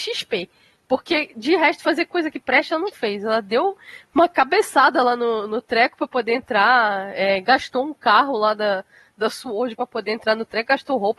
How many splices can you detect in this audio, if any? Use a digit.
0